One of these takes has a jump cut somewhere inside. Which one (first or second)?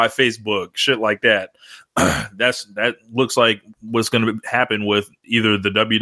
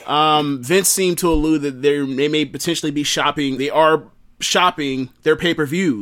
second